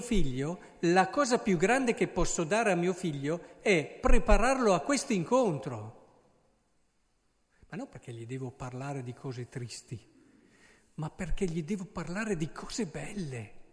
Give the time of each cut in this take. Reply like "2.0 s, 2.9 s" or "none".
none